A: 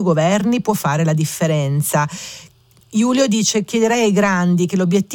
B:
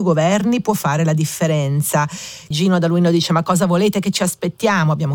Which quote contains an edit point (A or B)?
B